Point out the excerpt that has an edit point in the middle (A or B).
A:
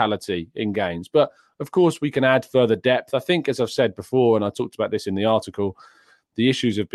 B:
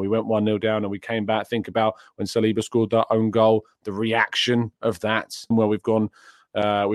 B